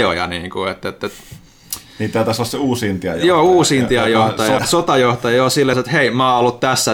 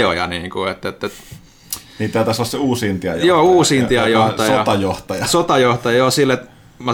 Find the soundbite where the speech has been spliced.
first; 2 cuts; at 4.6 s, 5.7 s

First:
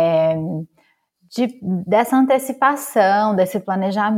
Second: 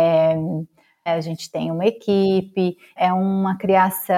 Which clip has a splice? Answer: second; 2 cuts; at 1.1 s, 3.0 s

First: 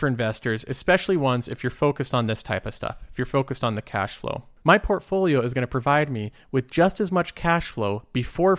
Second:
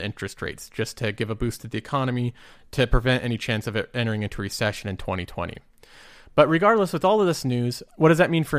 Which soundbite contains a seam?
first; 1 cut; at 4.6 s

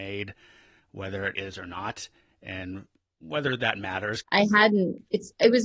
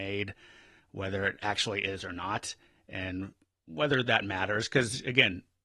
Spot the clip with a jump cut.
first; 2 cuts; at 1.4 s, 4.2 s

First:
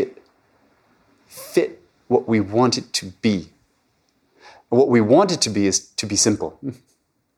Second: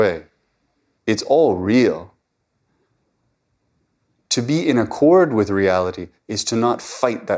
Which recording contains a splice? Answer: second; 1 cut; at 1.0 s

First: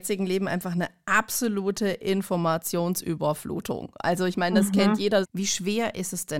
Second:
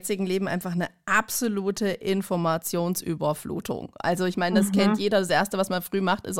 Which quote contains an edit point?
first; 1 cut; at 5.2 s

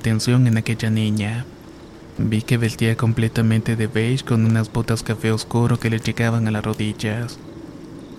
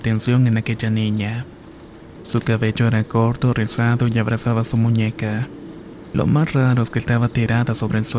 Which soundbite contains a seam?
second; 1 cut; at 2.1 s

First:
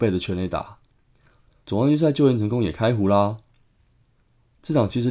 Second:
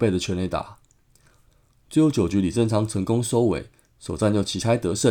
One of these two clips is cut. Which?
first; 1 cut; at 1.6 s

